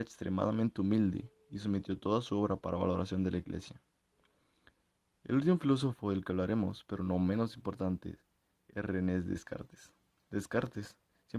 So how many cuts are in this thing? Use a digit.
1